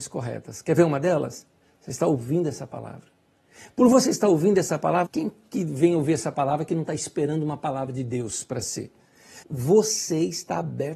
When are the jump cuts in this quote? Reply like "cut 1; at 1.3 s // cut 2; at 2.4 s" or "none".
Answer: cut 1; at 5.1 s // cut 2; at 9.4 s